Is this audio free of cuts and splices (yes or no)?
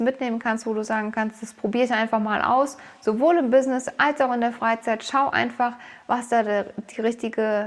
yes